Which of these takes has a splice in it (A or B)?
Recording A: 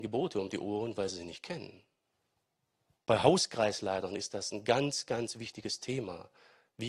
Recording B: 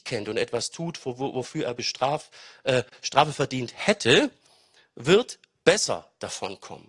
A